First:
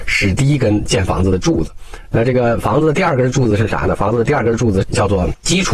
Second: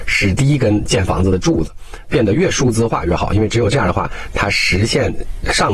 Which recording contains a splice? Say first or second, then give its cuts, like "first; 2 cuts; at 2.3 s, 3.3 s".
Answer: second; 1 cut; at 2.0 s